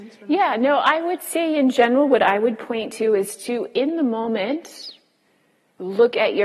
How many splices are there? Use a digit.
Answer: 0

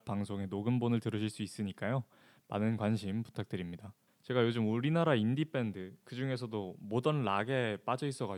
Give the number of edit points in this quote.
1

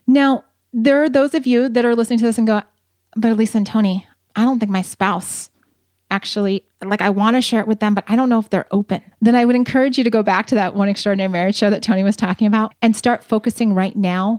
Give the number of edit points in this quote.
2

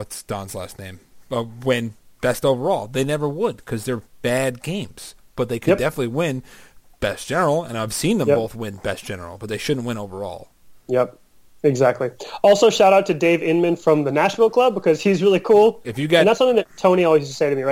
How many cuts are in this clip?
1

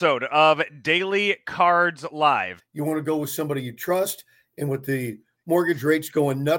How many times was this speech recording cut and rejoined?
1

